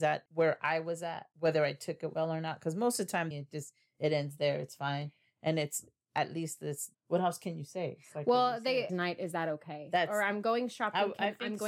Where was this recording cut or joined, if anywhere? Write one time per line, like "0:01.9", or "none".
0:03.3
0:06.9
0:08.9

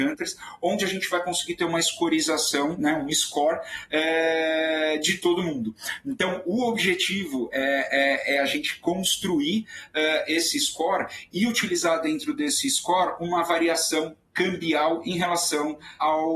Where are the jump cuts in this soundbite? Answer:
none

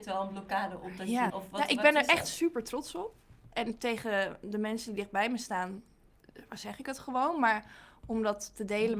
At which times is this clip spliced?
0:01.3

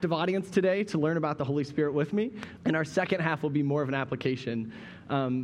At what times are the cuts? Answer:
0:02.6

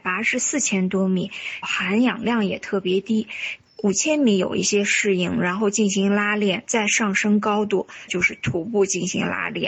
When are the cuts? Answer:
0:01.6
0:03.6
0:08.1

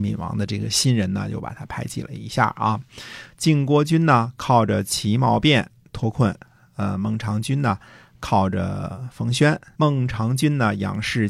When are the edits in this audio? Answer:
0:09.8

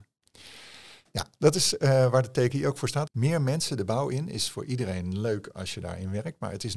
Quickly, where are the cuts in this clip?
0:03.1

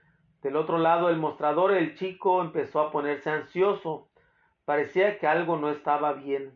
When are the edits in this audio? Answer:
none

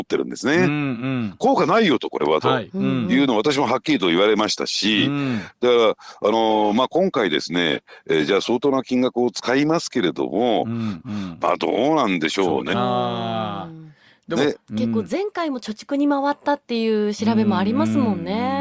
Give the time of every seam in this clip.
0:11.0
0:12.7
0:14.7

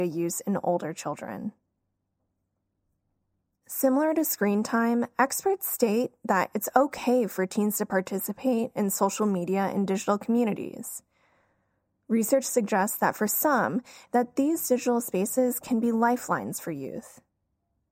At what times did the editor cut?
0:14.1

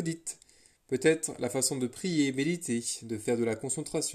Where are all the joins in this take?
none

